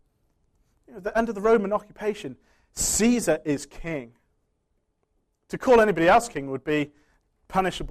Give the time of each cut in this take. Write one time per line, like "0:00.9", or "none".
none